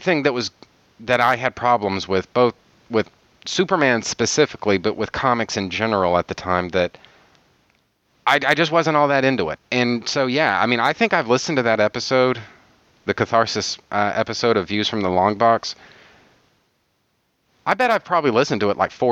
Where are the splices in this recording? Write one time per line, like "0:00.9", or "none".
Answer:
0:09.6